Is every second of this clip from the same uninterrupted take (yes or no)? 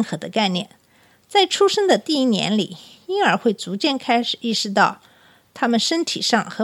yes